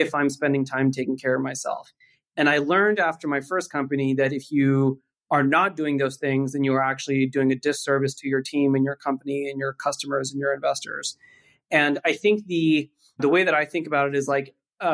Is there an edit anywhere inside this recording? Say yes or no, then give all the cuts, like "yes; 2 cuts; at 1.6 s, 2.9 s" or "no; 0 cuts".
no; 0 cuts